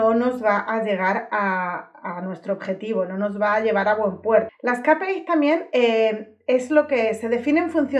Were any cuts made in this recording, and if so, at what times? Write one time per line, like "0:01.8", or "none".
0:04.5